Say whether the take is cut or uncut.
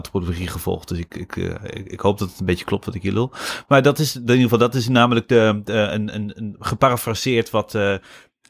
uncut